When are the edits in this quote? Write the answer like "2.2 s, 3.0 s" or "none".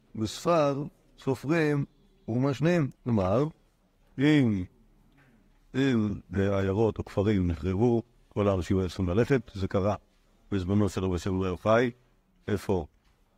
2.9 s